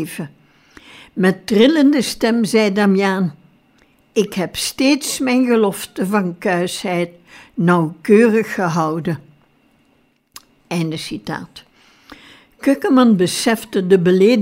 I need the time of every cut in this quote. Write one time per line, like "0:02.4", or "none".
none